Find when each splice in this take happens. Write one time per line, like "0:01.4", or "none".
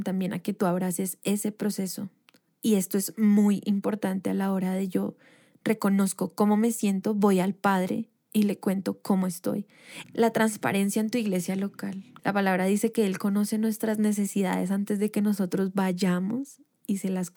0:02.5
0:10.0
0:12.2